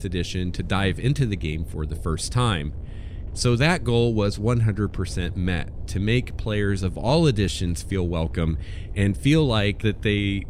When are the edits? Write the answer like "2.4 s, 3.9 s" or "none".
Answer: 3.3 s